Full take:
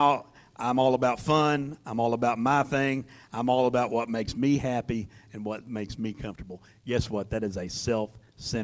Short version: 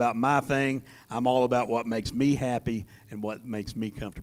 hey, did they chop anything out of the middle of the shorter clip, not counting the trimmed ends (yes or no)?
no